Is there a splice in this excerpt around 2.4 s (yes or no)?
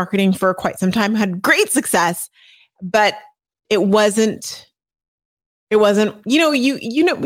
no